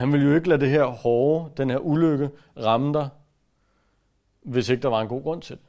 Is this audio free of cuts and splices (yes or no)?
yes